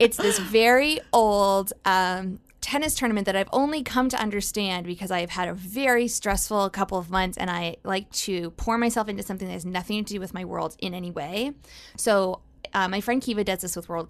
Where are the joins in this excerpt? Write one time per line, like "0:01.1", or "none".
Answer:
none

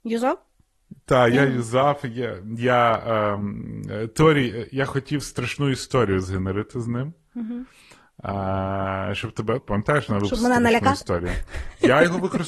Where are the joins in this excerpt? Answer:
0:09.6

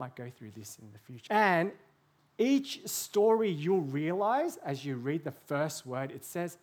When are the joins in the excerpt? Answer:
0:01.3

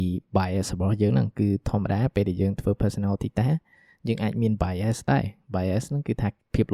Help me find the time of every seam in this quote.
none

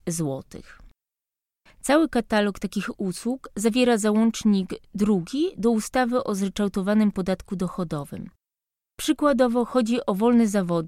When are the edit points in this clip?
0:01.7

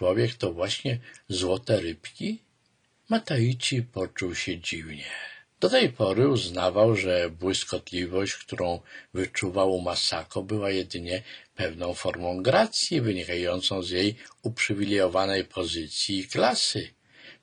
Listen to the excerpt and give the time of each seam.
none

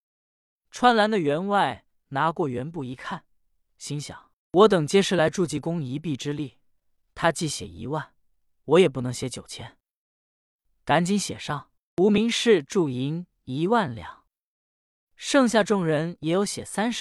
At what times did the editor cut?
none

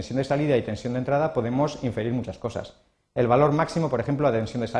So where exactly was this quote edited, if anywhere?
none

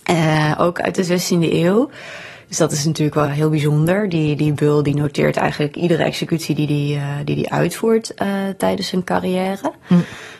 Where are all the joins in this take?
0:03.2

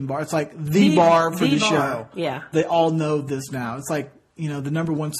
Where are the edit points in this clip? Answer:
0:02.5

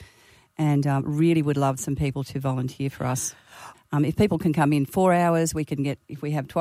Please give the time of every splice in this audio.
0:03.7
0:04.9

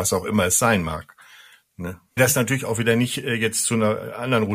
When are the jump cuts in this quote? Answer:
0:02.2

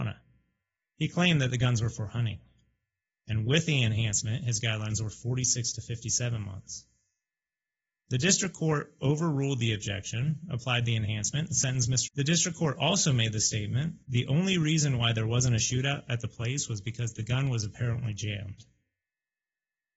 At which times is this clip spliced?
0:03.2
0:12.1
0:14.0

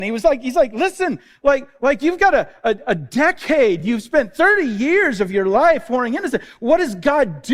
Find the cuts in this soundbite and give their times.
none

